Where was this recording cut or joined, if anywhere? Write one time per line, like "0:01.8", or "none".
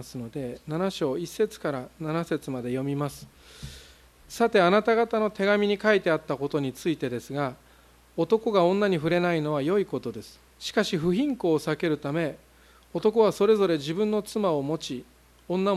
0:10.5